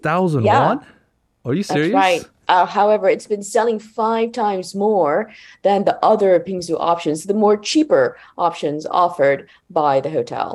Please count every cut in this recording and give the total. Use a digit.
1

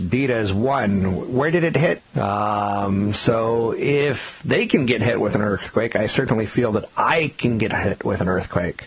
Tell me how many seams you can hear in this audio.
1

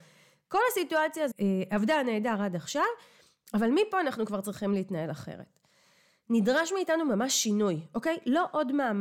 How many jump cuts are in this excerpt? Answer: 1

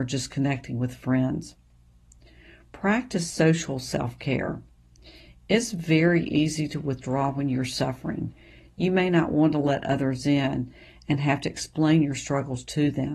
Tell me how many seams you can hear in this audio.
0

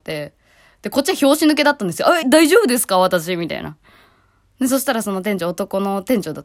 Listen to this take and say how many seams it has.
1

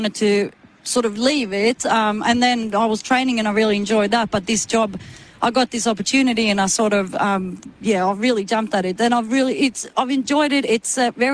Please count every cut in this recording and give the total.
0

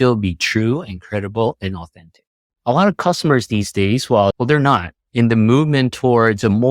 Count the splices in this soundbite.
2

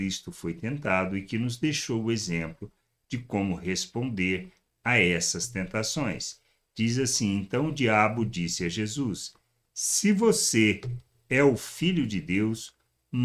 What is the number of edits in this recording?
1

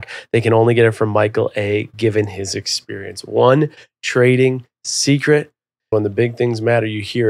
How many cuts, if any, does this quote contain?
1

